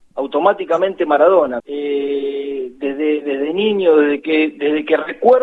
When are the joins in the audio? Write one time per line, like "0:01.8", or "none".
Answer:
0:01.6